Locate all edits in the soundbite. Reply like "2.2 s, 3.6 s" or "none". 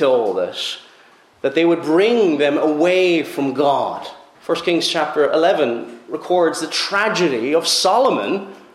4.3 s

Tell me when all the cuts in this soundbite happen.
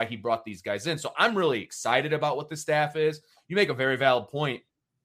none

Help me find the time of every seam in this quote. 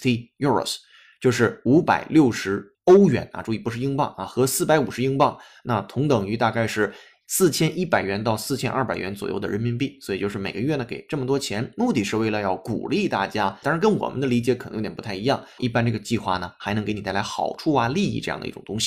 13.6 s, 15.6 s

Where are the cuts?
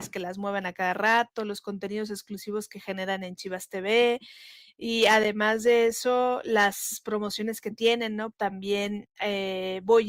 8.3 s

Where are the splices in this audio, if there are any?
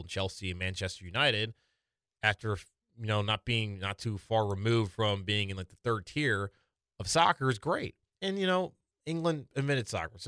none

